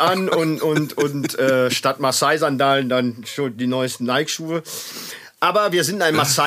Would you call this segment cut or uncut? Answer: uncut